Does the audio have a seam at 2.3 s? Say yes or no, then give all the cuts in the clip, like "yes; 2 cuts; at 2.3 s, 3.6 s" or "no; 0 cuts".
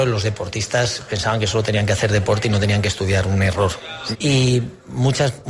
no; 1 cut; at 4.1 s